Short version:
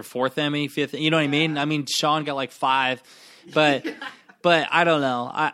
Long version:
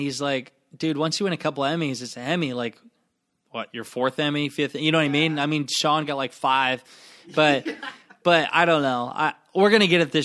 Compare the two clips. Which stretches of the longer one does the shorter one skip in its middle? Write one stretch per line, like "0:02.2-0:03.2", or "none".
none

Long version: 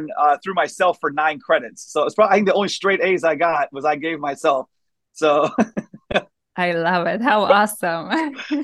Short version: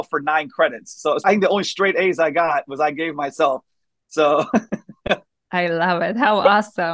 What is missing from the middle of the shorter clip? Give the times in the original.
0:02.1-0:02.3

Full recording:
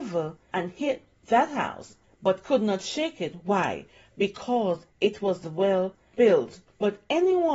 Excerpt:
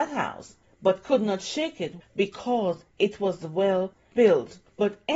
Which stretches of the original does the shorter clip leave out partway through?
0:03.4-0:04.0

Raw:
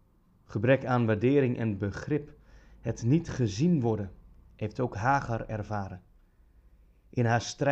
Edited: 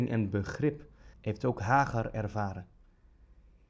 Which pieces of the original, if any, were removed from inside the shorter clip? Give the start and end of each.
0:02.6-0:04.5

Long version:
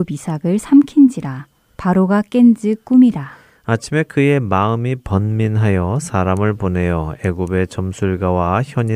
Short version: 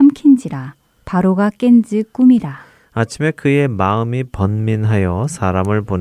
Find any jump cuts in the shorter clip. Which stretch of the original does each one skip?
none

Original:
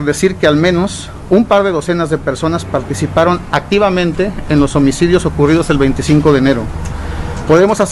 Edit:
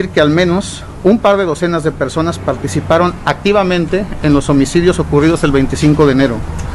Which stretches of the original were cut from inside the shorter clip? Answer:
none

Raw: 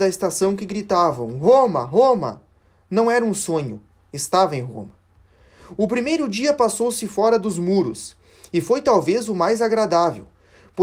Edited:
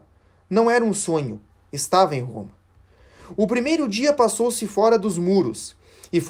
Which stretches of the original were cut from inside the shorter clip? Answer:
none

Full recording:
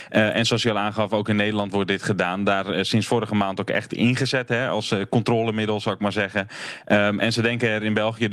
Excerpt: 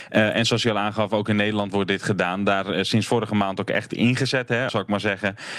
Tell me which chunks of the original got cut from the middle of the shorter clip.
0:04.7-0:05.8

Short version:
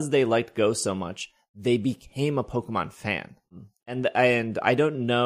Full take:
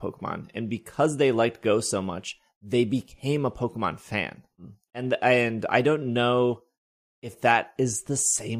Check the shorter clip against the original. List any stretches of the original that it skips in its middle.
none

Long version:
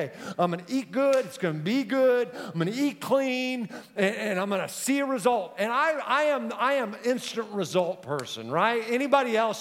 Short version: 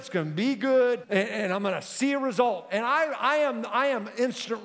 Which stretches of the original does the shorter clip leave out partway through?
0:02.3-0:03.9

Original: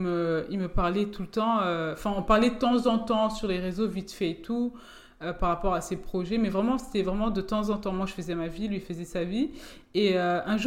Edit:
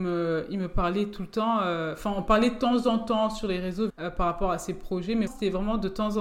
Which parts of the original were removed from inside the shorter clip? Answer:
0:03.9-0:05.1
0:06.5-0:06.8

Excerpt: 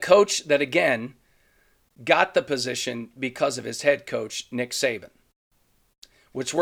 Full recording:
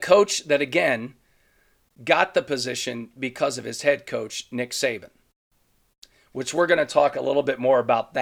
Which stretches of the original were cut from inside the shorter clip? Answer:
none

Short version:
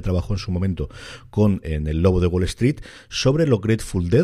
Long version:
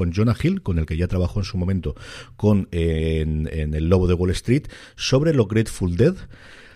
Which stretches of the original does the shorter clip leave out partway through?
0:02.7-0:03.5

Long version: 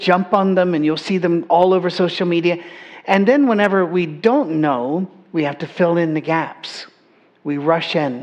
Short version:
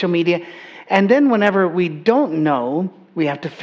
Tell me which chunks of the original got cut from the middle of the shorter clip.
none

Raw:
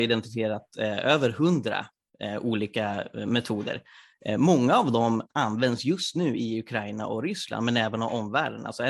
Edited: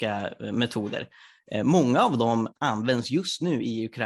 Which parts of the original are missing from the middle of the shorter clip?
none

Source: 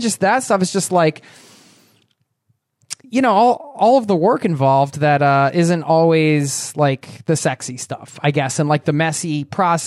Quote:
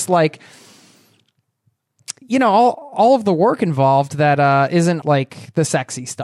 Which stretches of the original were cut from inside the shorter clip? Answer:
0:05.8-0:06.7

